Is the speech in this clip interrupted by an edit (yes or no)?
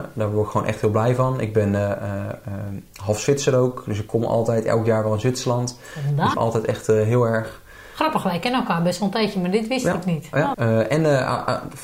yes